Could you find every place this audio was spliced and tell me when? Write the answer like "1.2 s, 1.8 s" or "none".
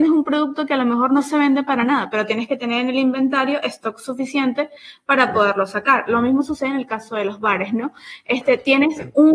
none